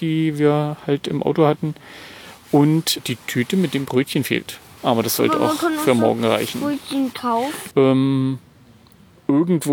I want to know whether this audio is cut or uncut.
cut